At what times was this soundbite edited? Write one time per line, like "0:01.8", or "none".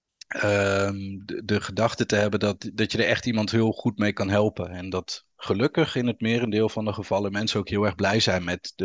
none